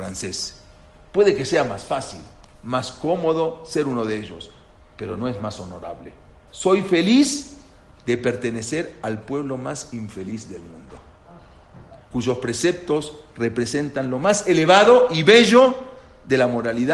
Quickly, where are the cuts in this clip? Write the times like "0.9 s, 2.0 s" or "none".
6.5 s, 12.0 s